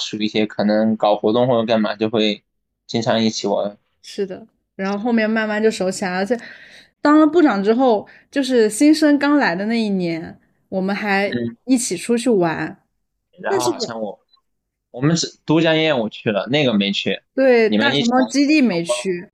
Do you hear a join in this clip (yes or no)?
yes